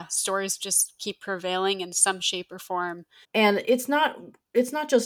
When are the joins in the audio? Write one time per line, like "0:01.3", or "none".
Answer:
0:03.2